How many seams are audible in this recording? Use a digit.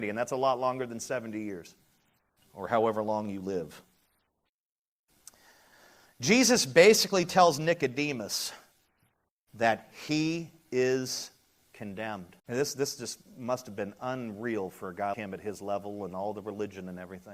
2